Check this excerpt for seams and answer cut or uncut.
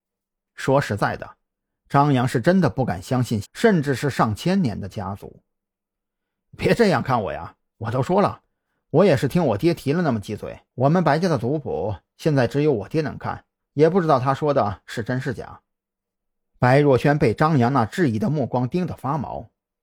cut